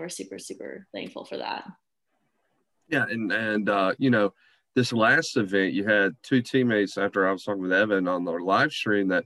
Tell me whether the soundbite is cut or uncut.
uncut